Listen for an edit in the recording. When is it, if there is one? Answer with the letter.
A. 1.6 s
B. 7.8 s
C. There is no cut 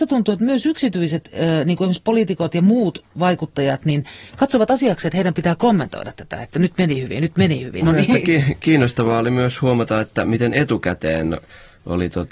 B